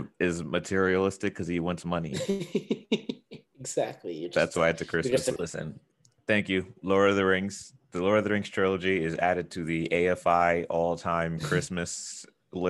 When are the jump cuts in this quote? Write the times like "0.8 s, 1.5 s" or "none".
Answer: 5.4 s